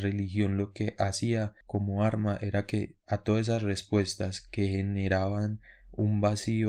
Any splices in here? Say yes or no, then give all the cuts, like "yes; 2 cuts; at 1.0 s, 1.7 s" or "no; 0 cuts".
no; 0 cuts